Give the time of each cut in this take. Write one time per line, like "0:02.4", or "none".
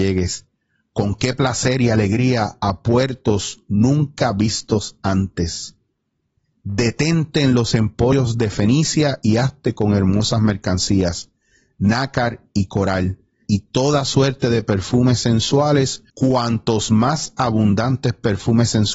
0:13.4
0:16.1